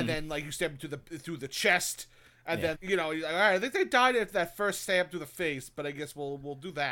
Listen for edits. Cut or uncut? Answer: cut